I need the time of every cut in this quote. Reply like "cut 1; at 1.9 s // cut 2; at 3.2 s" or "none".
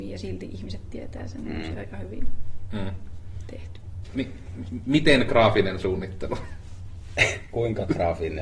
cut 1; at 4.0 s